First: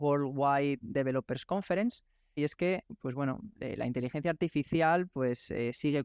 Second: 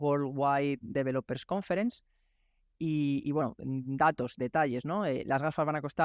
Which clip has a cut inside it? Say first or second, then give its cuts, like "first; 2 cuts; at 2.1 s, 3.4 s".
first; 1 cut; at 2.4 s